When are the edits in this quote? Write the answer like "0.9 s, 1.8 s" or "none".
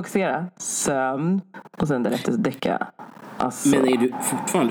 none